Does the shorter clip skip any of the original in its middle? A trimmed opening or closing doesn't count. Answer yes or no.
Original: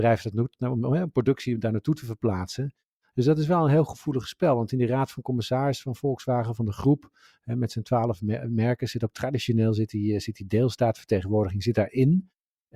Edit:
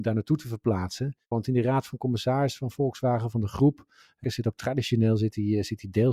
yes